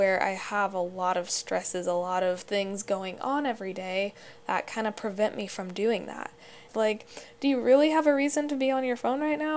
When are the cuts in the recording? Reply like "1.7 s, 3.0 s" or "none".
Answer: 6.7 s